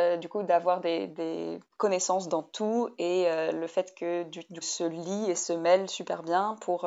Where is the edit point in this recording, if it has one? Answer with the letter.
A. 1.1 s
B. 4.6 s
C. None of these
B